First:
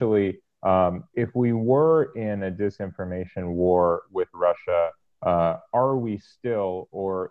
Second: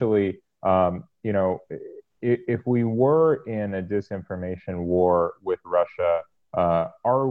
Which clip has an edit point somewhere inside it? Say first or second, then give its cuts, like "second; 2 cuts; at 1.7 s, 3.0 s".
first; 1 cut; at 1.1 s